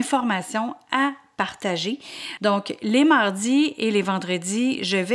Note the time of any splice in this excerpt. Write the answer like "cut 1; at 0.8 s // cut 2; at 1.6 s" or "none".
cut 1; at 2.4 s